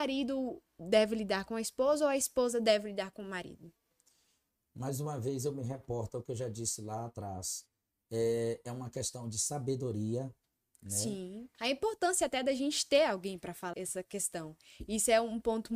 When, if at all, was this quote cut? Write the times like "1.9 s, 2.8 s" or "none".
11.5 s, 13.7 s